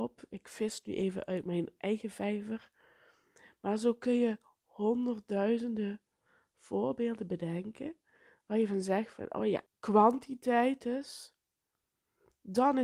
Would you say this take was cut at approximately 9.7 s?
yes; 1 cut; at 9.7 s

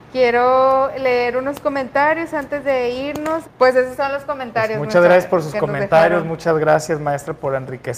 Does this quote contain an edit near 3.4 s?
yes; 1 cut; at 3.4 s

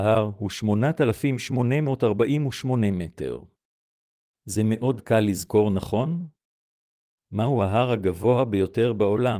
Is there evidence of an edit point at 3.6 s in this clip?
no; 1 cut; at 7.1 s

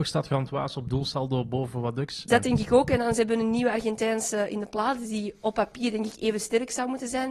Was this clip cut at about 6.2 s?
no; 1 cut; at 2.3 s

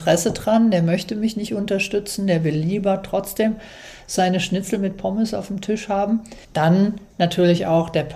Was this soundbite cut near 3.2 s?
no; 1 cut; at 6.4 s

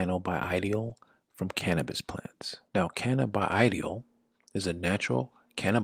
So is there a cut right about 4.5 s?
no; 1 cut; at 2.7 s

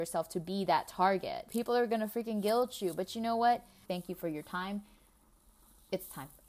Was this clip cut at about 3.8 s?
yes; 2 cuts; at 1.5 s, 3.8 s

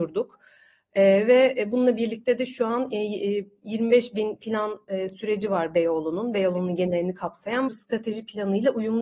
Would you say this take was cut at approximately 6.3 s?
no; 1 cut; at 7.7 s

